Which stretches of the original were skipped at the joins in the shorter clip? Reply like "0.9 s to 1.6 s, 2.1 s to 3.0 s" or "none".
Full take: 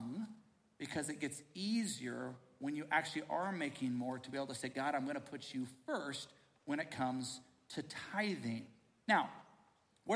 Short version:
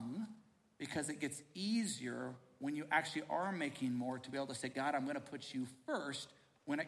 none